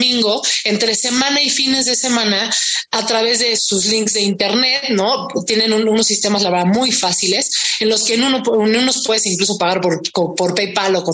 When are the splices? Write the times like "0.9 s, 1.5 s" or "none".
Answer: 3.6 s